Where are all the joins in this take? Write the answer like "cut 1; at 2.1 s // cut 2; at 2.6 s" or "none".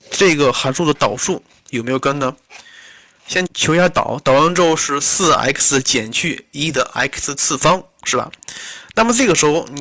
cut 1; at 3.5 s

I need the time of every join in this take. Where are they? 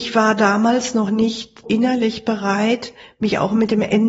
cut 1; at 1.6 s

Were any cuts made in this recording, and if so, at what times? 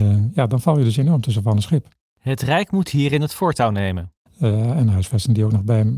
cut 1; at 4.3 s

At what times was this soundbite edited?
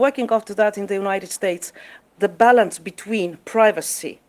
cut 1; at 2.0 s

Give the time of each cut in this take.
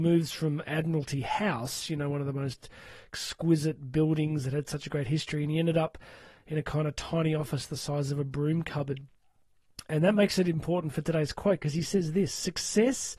none

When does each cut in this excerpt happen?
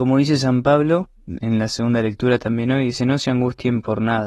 cut 1; at 1.4 s

